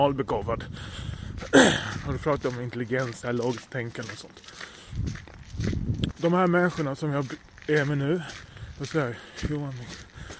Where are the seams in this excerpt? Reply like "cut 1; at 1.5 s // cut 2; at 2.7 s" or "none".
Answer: cut 1; at 6.1 s